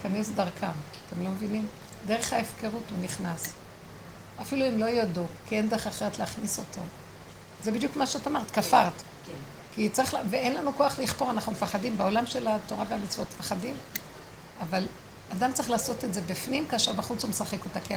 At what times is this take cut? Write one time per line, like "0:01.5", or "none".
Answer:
0:07.6